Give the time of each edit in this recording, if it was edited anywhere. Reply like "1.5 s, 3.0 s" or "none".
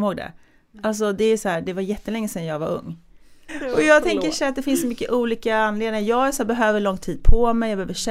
3.5 s

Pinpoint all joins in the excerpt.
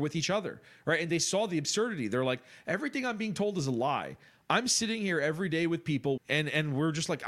6.2 s

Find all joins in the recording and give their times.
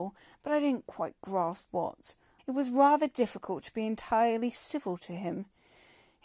2.4 s

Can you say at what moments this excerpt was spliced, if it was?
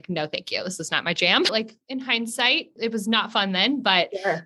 1.5 s, 2.8 s

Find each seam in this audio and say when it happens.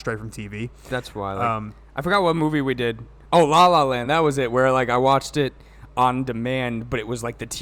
none

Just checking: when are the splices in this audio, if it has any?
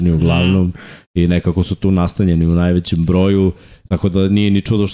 none

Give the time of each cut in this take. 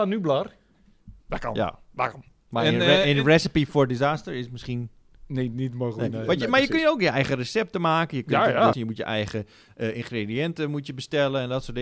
1.2 s, 8.7 s

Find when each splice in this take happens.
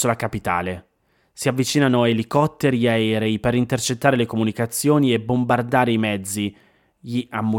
none

